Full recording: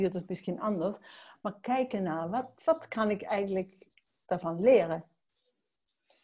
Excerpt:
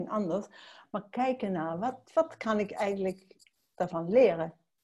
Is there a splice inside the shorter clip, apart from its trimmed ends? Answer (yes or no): no